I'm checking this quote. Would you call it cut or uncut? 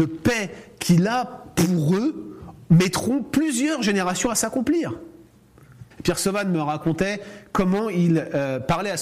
cut